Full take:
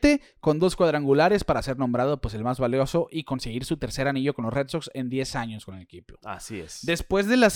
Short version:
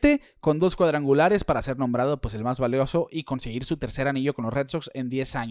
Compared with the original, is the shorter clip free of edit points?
yes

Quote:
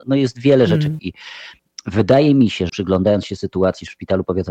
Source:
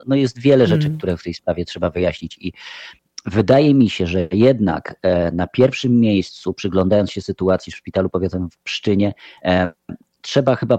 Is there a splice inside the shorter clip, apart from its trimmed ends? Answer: yes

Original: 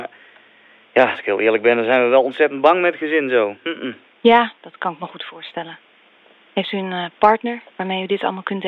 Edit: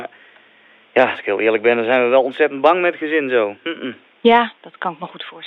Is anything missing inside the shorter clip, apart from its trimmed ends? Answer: no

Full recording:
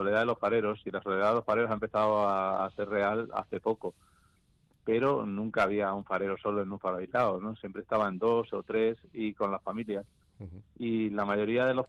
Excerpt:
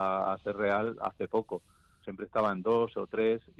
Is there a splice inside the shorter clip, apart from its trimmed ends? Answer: yes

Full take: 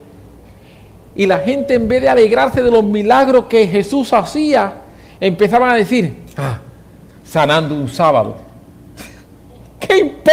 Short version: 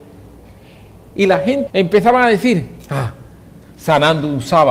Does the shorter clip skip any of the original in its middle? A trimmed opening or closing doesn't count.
yes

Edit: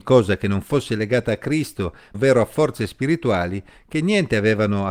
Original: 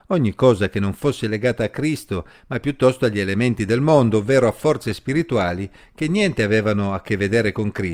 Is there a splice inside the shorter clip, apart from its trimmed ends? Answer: yes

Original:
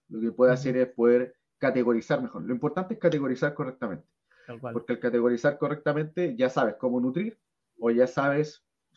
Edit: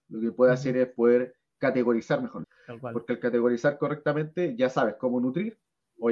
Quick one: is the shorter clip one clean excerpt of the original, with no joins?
no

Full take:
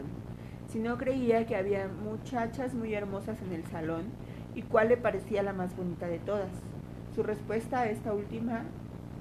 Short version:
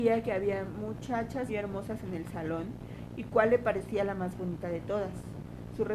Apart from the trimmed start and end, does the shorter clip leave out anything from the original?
yes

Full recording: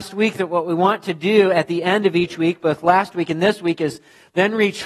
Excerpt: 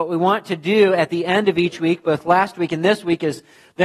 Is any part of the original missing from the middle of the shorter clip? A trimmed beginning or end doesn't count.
no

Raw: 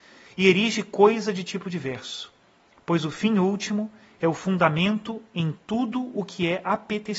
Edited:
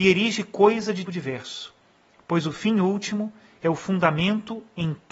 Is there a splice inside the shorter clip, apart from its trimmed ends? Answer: yes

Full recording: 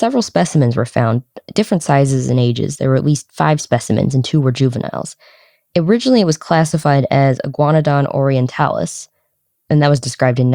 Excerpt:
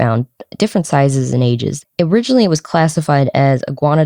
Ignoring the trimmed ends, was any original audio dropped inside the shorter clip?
yes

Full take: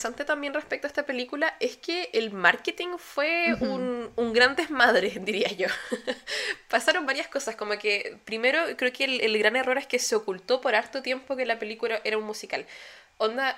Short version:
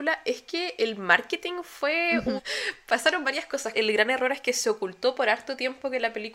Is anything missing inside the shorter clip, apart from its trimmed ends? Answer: yes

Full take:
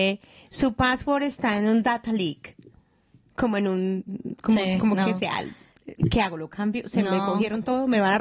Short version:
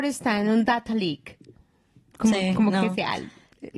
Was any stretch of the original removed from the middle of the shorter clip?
yes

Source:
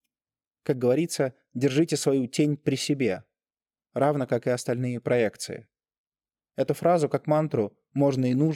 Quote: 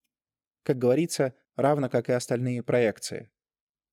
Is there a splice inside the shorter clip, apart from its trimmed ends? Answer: yes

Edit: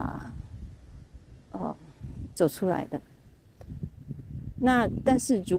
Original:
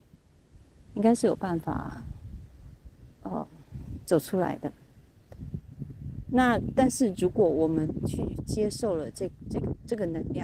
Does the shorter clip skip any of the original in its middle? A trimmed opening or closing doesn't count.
no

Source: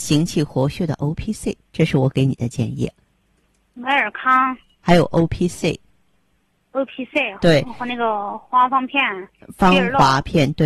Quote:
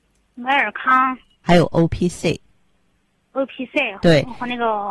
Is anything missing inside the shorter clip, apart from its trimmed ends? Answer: no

